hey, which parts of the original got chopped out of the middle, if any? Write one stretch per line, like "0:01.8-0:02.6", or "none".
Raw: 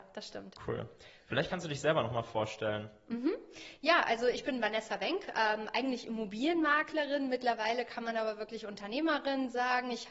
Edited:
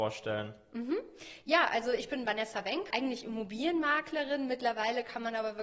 0:05.3-0:05.7